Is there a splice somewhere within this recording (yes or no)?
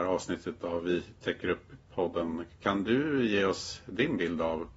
no